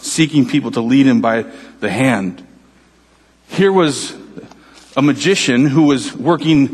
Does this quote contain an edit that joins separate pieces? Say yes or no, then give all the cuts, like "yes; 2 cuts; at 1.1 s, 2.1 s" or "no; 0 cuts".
no; 0 cuts